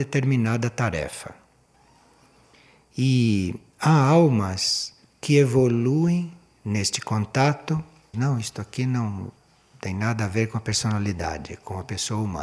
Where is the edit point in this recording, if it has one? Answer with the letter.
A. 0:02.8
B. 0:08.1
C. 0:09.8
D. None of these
B